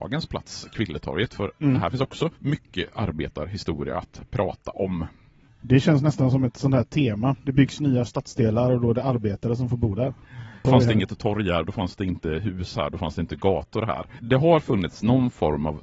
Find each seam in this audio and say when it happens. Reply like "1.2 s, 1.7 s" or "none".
2.4 s, 10.6 s, 14.2 s